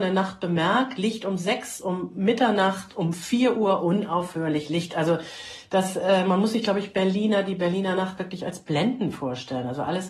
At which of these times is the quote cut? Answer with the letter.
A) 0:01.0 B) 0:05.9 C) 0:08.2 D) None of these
D